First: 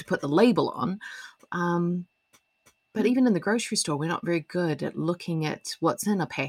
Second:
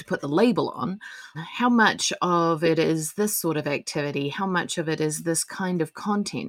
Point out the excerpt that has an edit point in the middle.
second; 1 cut; at 1.3 s

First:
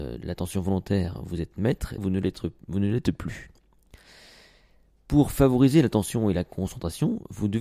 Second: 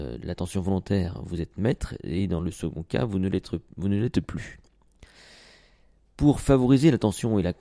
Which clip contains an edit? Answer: first; 1 cut; at 2.0 s

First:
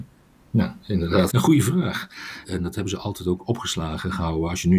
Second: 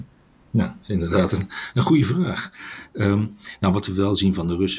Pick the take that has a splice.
first; 2 cuts; at 1.3 s, 2.4 s

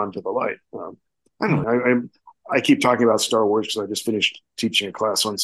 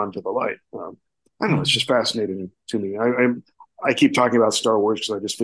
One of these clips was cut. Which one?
first; 1 cut; at 1.6 s

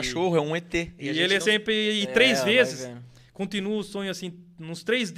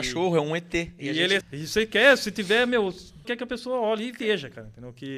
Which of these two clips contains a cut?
second; 2 cuts; at 1.4 s, 3.2 s

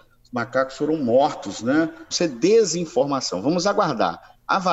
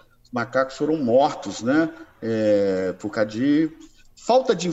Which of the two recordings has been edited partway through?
first; 1 cut; at 2.1 s

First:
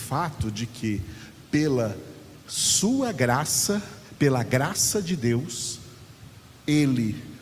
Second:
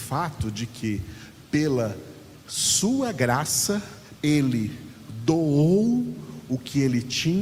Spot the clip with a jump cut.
second; 1 cut; at 4.2 s

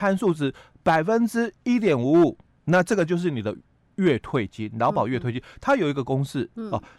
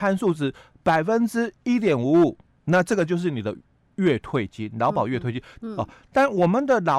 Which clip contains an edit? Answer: second; 1 cut; at 5.6 s

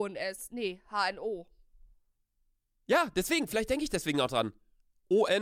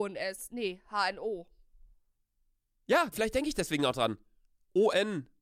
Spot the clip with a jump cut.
second; 1 cut; at 3.1 s

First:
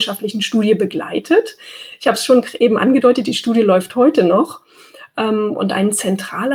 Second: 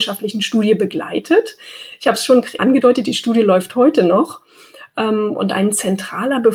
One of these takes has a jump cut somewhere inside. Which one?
second; 1 cut; at 2.6 s

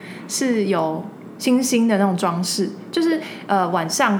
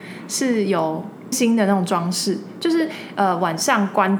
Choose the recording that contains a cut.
second; 1 cut; at 1.3 s

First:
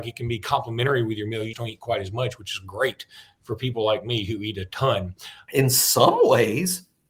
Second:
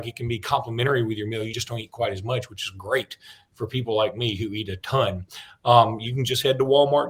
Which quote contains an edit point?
first; 2 cuts; at 1.5 s, 5.5 s

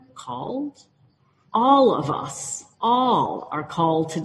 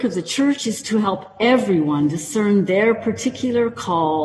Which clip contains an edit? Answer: first; 2 cuts; at 1.4 s, 2.7 s

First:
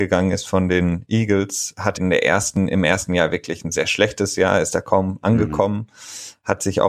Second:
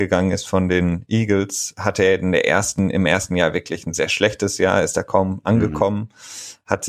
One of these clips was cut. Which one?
first; 1 cut; at 2.0 s

